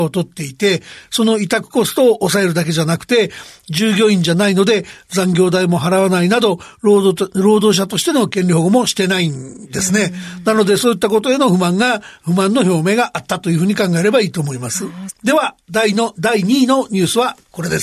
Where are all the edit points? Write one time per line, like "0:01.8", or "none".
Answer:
0:15.1